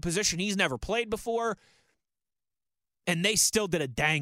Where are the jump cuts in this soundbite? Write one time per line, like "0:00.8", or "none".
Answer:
none